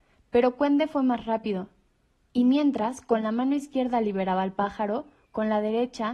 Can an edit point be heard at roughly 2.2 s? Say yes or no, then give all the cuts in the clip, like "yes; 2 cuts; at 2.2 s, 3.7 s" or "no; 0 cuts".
no; 0 cuts